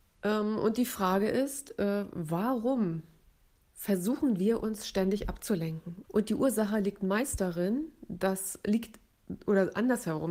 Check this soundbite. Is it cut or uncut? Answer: cut